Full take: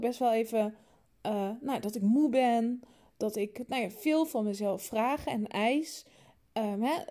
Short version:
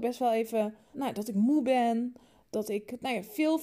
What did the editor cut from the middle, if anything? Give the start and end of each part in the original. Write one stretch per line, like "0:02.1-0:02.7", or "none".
0:00.9-0:01.6